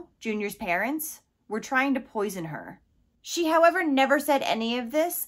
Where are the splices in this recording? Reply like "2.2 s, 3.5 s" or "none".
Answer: none